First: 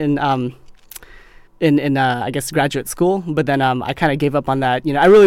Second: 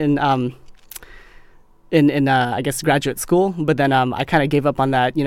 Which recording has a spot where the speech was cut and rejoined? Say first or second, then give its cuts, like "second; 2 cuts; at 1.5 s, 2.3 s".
first; 1 cut; at 1.5 s